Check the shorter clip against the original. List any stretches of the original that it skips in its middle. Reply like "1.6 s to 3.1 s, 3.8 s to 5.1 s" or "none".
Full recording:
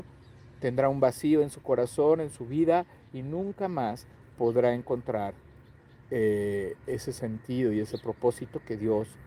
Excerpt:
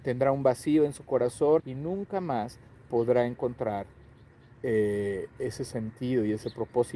2.2 s to 3.1 s